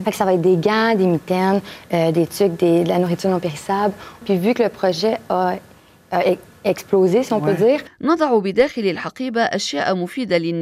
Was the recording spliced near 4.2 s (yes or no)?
yes